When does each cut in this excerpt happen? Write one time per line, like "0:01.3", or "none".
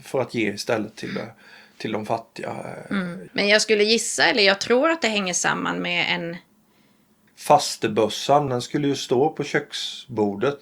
0:03.3
0:07.3
0:08.5